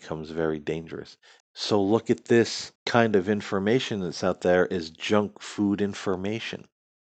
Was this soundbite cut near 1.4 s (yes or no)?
yes